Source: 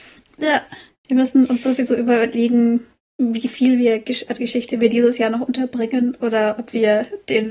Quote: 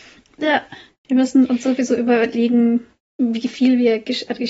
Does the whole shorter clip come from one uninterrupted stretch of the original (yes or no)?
yes